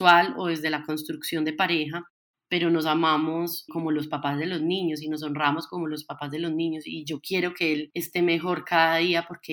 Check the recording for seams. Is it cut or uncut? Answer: cut